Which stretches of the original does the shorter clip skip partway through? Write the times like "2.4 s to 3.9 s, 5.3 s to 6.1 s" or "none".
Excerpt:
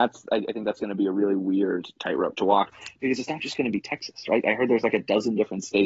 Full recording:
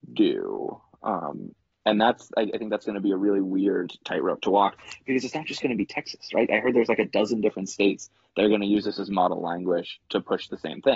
none